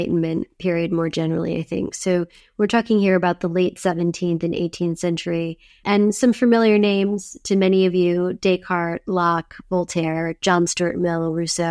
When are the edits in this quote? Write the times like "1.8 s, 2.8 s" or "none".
none